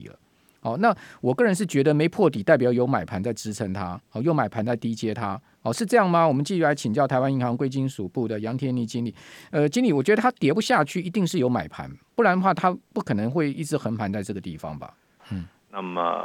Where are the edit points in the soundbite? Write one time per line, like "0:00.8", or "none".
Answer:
0:15.2